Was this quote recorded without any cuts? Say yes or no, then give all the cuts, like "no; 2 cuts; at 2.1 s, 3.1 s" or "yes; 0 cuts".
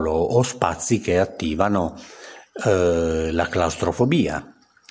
yes; 0 cuts